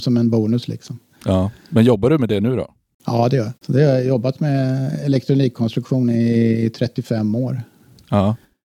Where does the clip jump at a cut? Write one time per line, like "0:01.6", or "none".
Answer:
0:03.6